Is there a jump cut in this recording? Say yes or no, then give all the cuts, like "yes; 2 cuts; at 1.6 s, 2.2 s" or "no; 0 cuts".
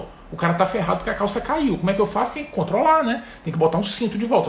no; 0 cuts